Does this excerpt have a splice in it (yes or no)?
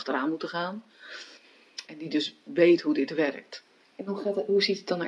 yes